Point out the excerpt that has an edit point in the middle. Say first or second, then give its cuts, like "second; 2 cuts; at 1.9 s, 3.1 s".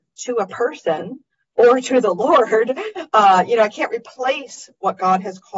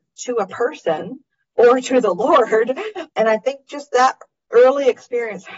second; 1 cut; at 3.1 s